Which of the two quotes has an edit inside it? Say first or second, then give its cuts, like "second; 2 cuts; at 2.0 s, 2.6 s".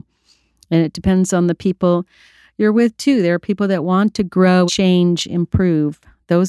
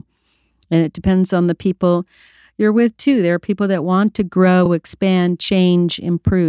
first; 1 cut; at 4.7 s